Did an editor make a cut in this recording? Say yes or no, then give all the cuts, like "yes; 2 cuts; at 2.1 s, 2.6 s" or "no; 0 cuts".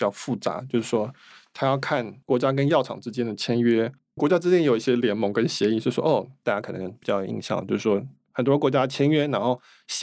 yes; 1 cut; at 6.4 s